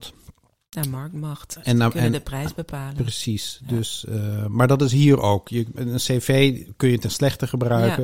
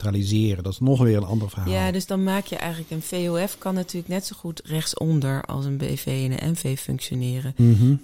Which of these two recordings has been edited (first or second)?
first